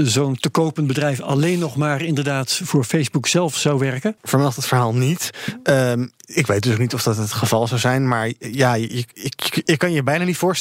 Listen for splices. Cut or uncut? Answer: cut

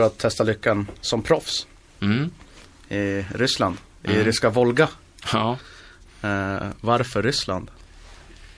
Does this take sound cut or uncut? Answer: uncut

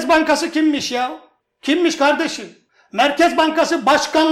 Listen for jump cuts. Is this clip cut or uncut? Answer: uncut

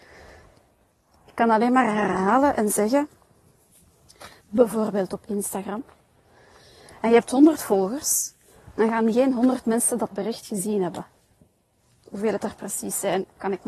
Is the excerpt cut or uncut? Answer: cut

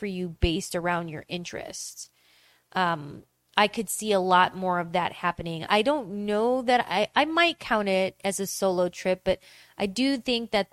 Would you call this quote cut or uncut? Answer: cut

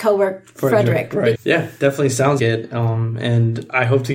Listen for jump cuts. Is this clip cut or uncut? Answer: cut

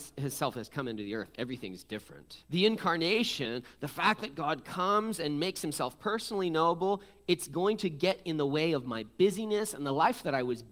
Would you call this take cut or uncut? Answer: cut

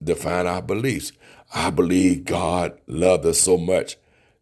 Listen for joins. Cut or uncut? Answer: uncut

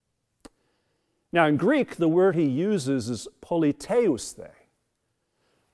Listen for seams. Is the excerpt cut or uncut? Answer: uncut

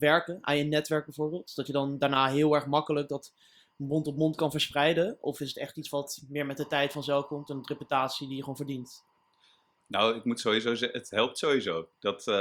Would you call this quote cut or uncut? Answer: uncut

